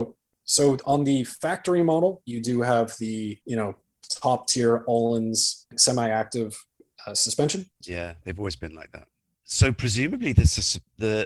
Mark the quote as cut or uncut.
cut